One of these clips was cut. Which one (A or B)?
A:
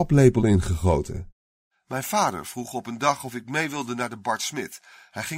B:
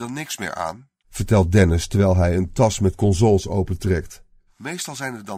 B